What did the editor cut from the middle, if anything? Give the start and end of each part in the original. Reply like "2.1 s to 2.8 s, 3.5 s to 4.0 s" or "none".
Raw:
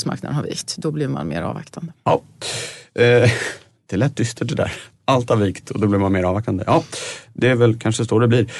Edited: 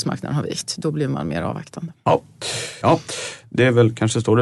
2.8 s to 6.7 s